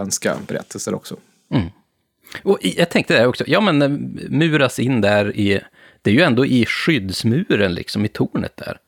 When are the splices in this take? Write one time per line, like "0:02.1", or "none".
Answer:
none

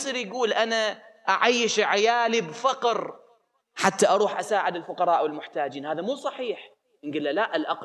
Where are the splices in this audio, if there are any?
none

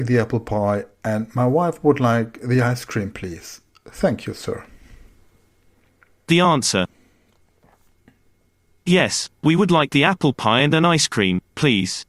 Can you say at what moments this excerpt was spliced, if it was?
none

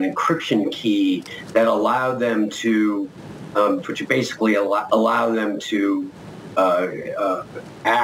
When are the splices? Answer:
0:03.8
0:04.9

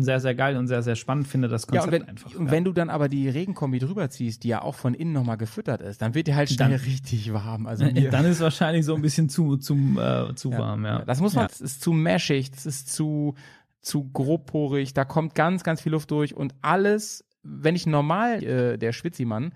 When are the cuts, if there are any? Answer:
0:11.5
0:18.4

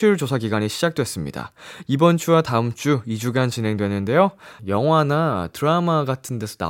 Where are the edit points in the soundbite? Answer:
0:04.6

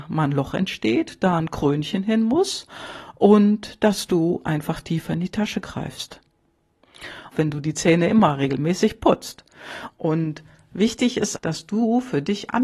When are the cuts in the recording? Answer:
0:07.3
0:09.9
0:11.4

